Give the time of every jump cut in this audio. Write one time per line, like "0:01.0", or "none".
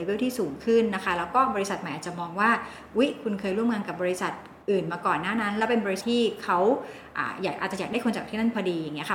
0:04.6
0:06.0